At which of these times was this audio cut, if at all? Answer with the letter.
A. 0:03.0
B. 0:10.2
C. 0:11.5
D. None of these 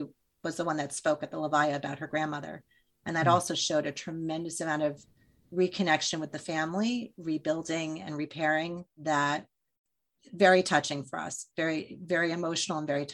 D